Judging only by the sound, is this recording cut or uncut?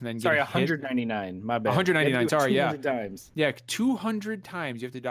uncut